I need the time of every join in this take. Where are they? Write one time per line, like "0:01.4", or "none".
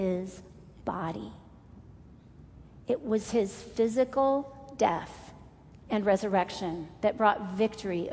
none